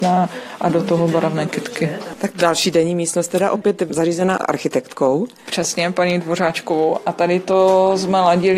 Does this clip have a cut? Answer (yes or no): no